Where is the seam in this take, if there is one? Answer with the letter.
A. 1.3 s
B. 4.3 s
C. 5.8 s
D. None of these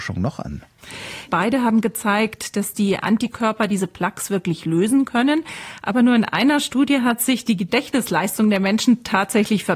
A